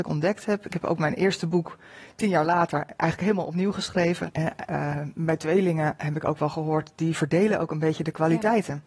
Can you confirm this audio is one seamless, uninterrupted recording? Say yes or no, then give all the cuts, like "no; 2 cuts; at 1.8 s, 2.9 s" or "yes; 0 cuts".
no; 1 cut; at 4.3 s